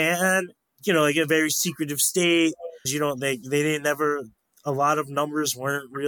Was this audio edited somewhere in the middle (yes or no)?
yes